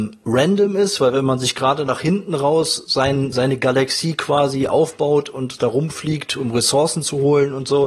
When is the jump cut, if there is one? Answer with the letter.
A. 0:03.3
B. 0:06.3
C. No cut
A